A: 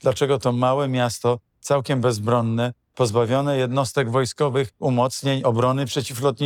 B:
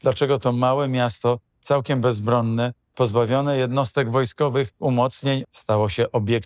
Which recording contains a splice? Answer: B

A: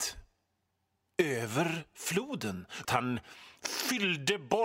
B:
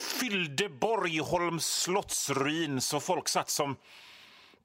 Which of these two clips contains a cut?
A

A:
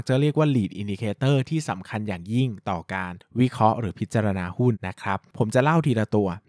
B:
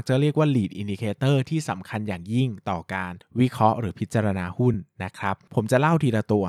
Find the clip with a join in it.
A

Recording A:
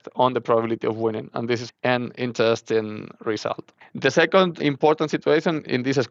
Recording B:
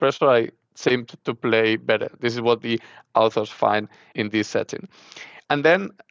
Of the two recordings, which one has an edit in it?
A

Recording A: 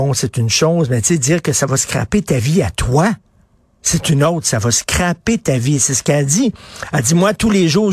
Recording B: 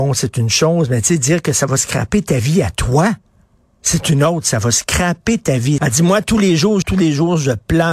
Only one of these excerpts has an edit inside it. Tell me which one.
B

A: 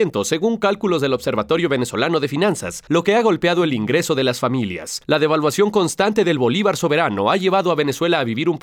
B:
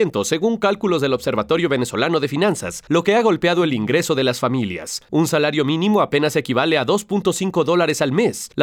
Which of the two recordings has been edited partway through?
A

